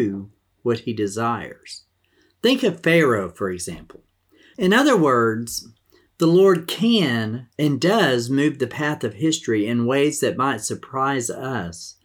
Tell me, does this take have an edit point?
yes; 2 cuts; at 4.5 s, 7.5 s

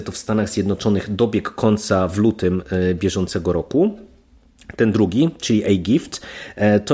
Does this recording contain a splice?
no; 0 cuts

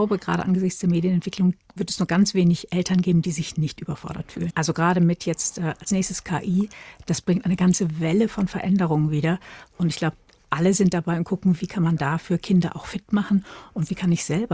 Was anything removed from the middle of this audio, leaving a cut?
yes; 2 cuts; at 4.5 s, 11.6 s

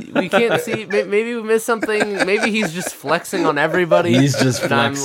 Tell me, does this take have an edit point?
no; 0 cuts

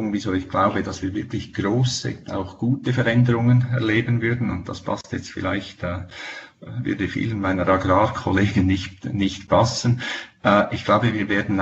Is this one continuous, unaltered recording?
yes; 0 cuts

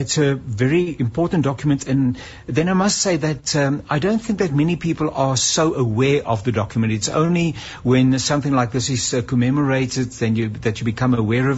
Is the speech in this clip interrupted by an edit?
no; 0 cuts

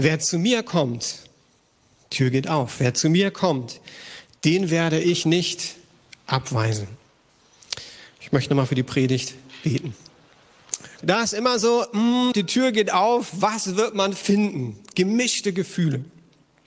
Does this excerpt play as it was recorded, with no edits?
no; 2 cuts; at 11.0 s, 12.3 s

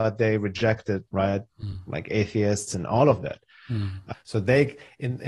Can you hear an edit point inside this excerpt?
yes; 3 cuts; at 1.1 s, 2.7 s, 4.1 s

